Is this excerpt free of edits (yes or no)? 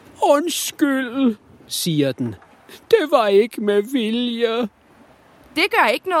yes